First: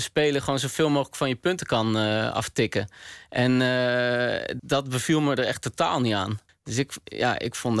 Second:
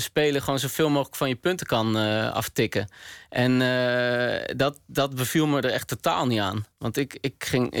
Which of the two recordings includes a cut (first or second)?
first